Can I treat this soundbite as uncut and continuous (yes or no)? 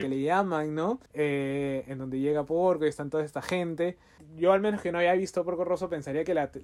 no